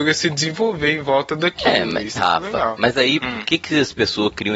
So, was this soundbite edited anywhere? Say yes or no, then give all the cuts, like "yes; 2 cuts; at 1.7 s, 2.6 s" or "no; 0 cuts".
yes; 2 cuts; at 2.2 s, 3.2 s